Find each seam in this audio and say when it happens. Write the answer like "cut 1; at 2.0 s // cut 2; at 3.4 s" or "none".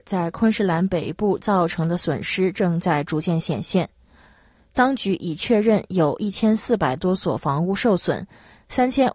none